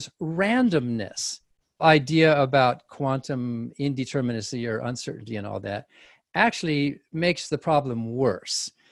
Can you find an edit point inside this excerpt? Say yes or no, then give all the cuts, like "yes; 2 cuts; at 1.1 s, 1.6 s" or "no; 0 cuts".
yes; 1 cut; at 1.8 s